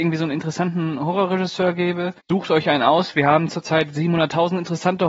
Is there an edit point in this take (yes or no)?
yes